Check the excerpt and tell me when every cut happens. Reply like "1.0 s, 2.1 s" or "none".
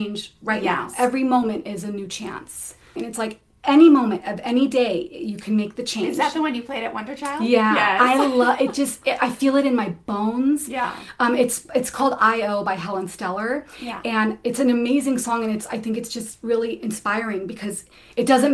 3.0 s